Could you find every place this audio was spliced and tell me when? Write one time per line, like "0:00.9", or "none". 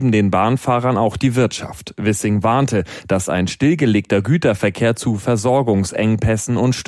none